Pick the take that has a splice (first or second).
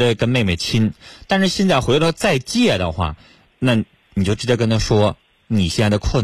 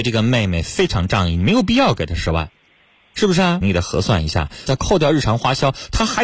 second